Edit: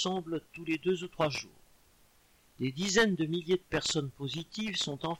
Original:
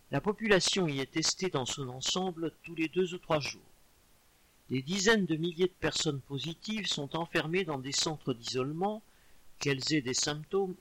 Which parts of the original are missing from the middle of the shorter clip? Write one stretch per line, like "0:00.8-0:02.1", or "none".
none

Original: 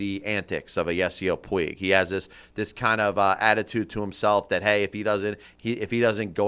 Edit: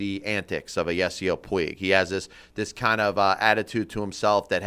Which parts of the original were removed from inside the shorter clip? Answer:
none

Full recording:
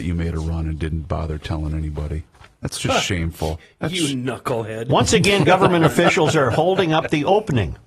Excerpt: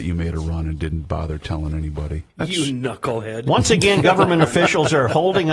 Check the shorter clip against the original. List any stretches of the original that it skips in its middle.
0:02.3-0:03.7

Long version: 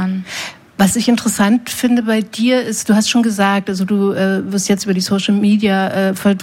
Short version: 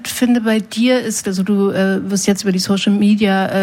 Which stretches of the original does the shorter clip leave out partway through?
0:02.8-0:03.6

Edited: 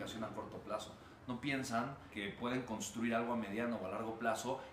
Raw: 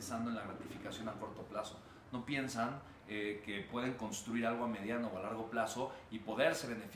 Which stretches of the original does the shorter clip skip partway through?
0:03.0-0:03.4

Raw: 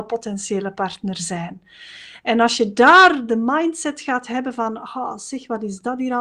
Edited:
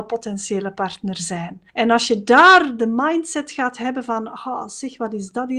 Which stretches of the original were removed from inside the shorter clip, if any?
0:01.7-0:02.2

